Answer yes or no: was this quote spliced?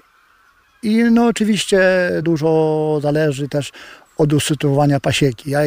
yes